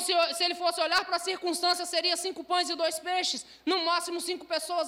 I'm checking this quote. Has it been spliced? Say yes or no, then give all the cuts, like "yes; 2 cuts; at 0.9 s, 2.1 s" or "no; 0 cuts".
no; 0 cuts